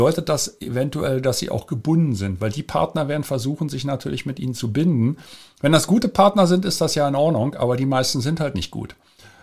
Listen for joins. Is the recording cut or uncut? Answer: uncut